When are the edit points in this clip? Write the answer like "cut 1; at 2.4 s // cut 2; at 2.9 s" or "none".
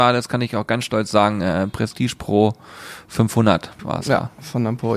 cut 1; at 3.8 s